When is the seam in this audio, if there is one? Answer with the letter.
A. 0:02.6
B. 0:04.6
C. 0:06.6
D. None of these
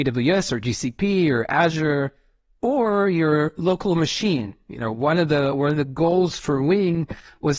D